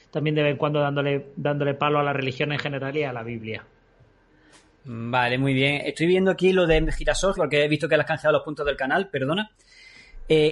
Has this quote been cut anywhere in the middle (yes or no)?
yes